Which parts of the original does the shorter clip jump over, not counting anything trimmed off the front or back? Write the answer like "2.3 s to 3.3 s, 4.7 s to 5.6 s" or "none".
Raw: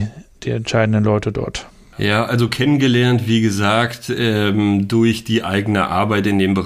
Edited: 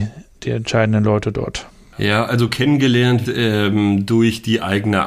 3.2 s to 4.1 s